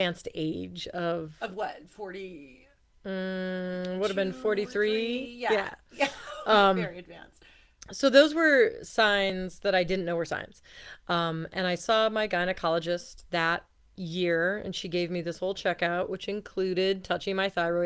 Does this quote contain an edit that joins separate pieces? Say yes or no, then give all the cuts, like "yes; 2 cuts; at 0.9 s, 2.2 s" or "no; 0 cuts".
no; 0 cuts